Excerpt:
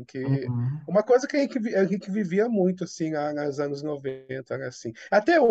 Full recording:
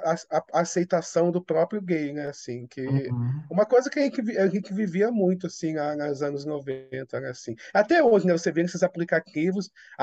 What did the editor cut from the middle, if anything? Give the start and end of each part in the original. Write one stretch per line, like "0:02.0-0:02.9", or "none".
none